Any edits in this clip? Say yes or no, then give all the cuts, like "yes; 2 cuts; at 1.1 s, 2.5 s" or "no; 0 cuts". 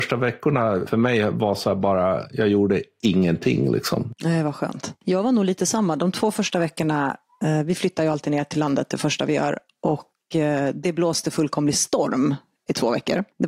no; 0 cuts